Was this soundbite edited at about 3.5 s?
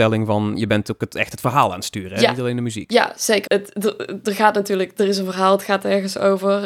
yes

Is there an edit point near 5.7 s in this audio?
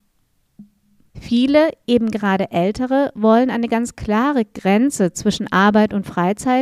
no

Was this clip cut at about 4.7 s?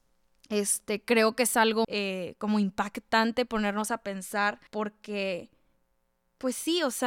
yes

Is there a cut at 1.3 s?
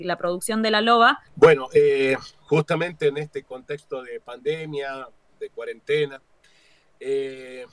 yes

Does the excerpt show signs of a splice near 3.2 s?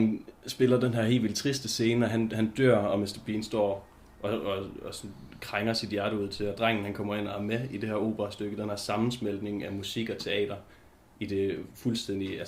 yes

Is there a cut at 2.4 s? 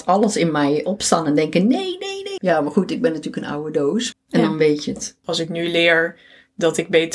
yes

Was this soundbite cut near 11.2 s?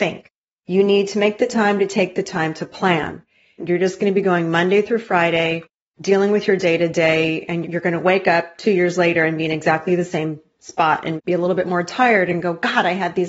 yes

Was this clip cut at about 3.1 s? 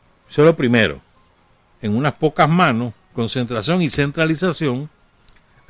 no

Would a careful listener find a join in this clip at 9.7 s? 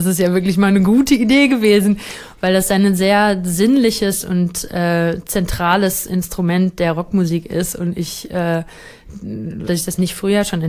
yes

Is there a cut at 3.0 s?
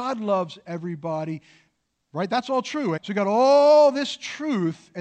yes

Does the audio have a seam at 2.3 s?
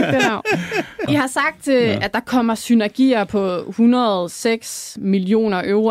no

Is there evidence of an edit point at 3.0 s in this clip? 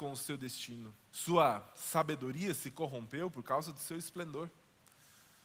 no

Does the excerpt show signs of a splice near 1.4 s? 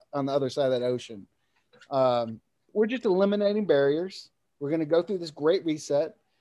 no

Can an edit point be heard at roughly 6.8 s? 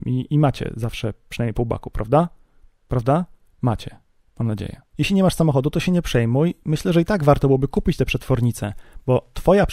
no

